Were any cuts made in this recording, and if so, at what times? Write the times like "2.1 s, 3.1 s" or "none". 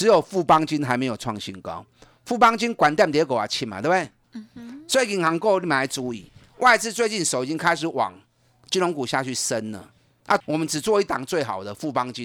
4.2 s, 10.4 s